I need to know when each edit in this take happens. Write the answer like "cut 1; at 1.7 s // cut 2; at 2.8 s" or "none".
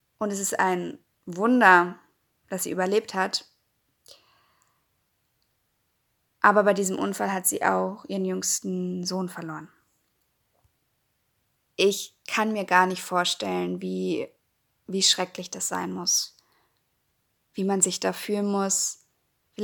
none

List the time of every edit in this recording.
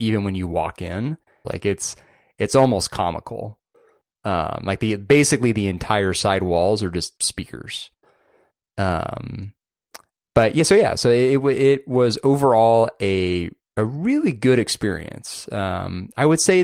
cut 1; at 1.4 s

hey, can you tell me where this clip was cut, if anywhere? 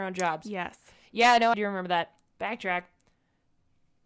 cut 1; at 1.5 s

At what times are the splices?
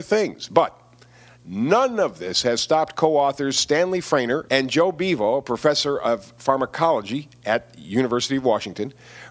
cut 1; at 4.5 s

